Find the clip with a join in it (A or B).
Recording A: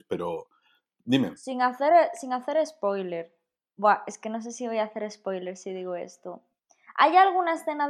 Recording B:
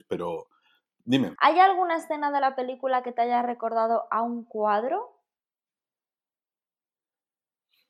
B